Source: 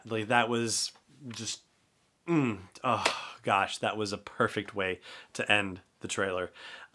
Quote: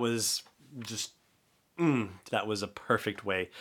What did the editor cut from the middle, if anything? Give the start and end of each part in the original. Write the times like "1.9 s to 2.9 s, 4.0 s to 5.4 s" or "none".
2.8 s to 3.8 s